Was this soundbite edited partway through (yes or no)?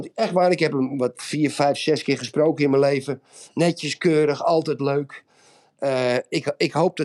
no